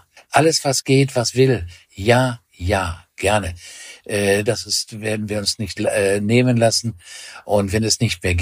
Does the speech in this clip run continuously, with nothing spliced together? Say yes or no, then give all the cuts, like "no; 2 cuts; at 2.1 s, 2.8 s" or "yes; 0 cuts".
no; 2 cuts; at 1.8 s, 4.5 s